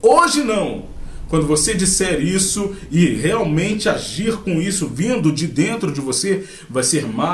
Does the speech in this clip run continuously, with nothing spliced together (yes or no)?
yes